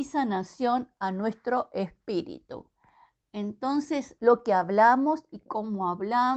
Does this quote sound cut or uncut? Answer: cut